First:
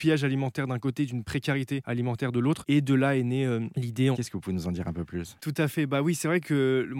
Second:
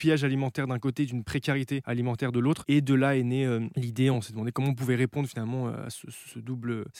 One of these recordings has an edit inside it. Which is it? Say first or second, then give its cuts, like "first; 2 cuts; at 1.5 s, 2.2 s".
first; 1 cut; at 4.1 s